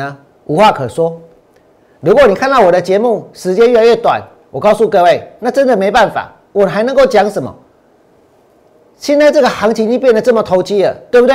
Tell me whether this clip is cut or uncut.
uncut